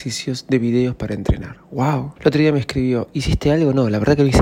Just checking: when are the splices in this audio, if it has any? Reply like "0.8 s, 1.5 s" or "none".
2.2 s